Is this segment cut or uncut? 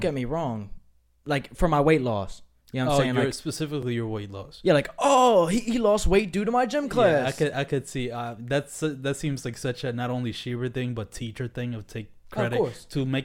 uncut